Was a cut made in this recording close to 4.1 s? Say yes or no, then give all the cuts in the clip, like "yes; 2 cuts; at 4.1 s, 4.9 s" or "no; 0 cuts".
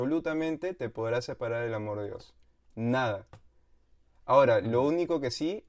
no; 0 cuts